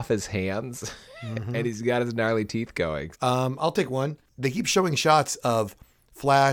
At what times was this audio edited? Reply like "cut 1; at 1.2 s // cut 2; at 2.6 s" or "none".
cut 1; at 3.1 s // cut 2; at 4.3 s